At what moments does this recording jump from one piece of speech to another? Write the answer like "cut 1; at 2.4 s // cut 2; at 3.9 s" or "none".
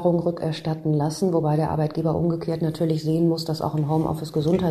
none